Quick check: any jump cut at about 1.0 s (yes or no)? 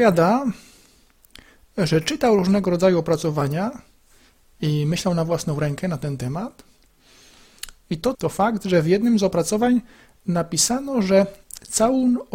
no